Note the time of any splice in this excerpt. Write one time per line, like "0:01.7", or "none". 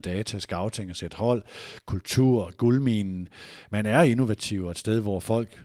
none